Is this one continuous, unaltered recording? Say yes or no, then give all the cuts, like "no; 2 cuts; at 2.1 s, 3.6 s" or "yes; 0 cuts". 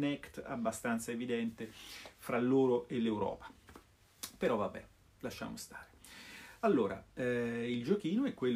yes; 0 cuts